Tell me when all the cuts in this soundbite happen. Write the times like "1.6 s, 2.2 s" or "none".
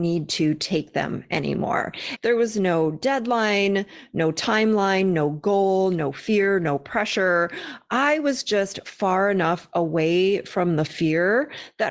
2.2 s